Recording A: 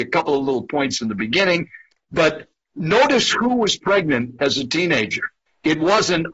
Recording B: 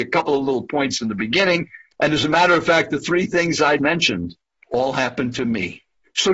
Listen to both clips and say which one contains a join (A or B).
B